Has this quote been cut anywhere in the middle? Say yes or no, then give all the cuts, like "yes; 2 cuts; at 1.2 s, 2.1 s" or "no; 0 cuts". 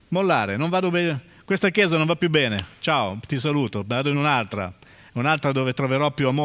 no; 0 cuts